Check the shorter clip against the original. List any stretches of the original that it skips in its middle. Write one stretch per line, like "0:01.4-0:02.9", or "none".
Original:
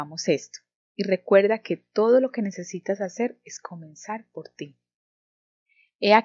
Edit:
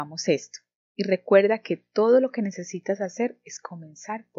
none